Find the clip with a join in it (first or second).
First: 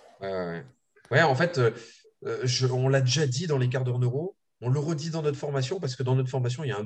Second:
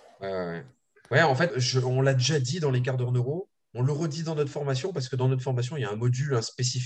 second